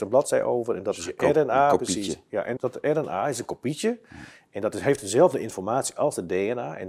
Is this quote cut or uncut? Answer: cut